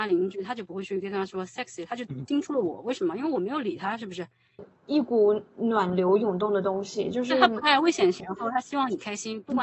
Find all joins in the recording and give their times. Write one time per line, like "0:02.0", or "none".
0:04.6
0:08.2